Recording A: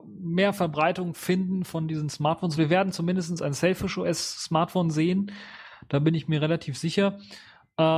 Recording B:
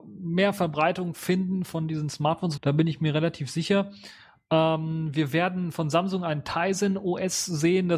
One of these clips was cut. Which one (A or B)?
B